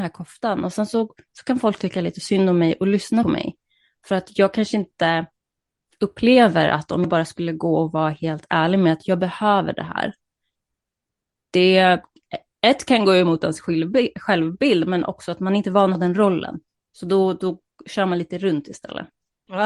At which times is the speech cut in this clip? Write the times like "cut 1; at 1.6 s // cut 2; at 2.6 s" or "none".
none